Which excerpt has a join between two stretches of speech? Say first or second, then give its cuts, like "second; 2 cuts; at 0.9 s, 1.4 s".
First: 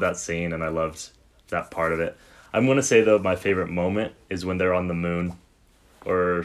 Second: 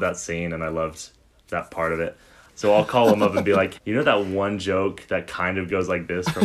second; 2 cuts; at 2.5 s, 3.7 s